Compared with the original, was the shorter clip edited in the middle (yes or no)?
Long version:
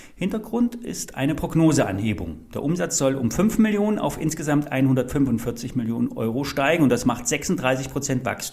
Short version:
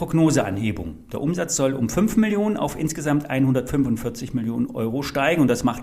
no